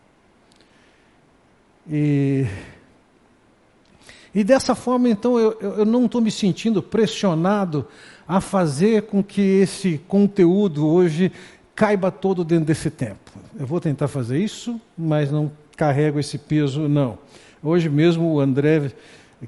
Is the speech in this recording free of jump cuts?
yes; 0 cuts

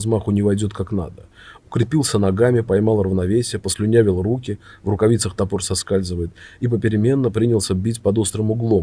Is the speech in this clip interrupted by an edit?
no; 0 cuts

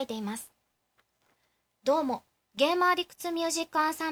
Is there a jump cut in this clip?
yes; 1 cut; at 2.3 s

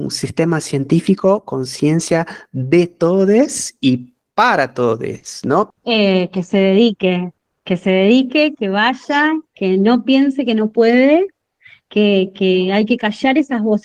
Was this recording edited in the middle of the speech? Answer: yes; 1 cut; at 5.7 s

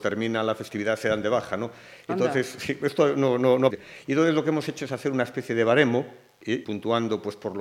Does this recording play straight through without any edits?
no; 2 cuts; at 3.7 s, 6.6 s

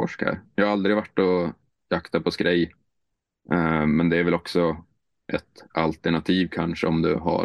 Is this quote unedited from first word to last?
yes; 0 cuts

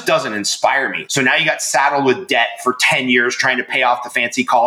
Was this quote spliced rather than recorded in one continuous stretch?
yes; 1 cut; at 1.1 s

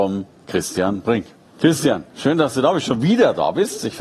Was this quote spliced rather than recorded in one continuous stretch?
yes; 1 cut; at 1.5 s

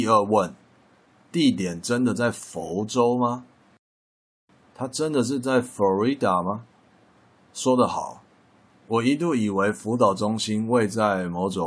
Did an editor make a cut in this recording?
no; 0 cuts

